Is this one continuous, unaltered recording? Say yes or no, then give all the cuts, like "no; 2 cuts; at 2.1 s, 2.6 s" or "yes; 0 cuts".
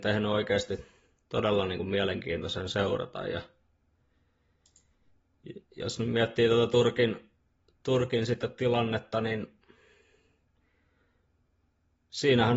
yes; 0 cuts